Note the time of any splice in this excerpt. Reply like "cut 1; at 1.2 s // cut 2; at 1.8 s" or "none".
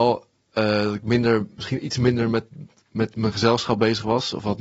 none

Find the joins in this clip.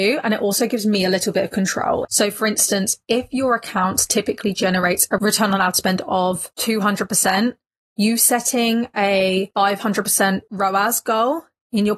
cut 1; at 2.0 s

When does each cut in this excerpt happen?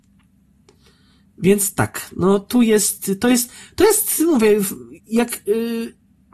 cut 1; at 5.0 s

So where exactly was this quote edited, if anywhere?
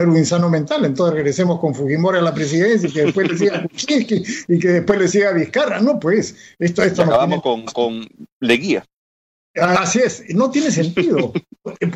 none

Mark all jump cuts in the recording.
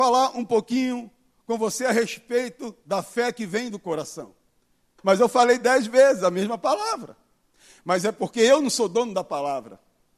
cut 1; at 5.0 s

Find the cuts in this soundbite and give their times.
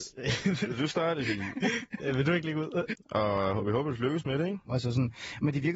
cut 1; at 2.9 s // cut 2; at 4.7 s

